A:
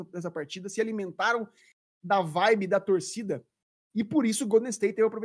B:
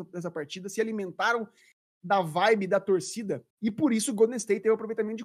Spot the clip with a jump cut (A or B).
B